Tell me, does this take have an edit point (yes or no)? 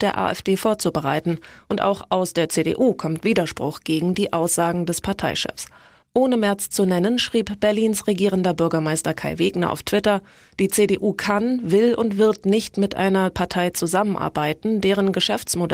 no